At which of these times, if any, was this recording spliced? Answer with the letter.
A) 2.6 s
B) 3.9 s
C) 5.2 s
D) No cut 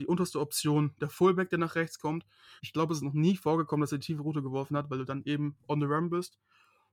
A